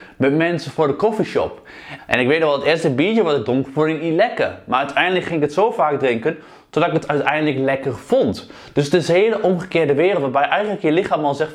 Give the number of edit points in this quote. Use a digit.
1